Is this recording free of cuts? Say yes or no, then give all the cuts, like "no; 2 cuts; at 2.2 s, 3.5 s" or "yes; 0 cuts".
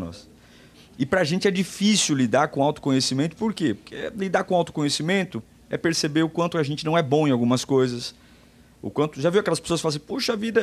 yes; 0 cuts